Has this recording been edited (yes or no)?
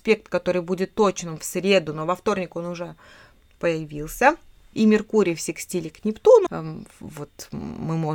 yes